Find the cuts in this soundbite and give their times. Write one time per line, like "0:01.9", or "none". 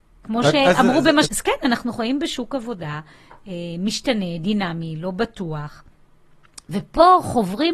0:01.2